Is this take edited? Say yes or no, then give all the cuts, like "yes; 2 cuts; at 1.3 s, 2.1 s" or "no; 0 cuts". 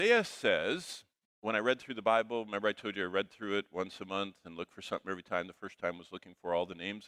no; 0 cuts